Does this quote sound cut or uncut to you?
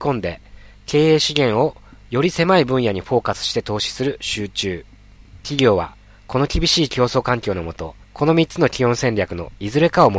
cut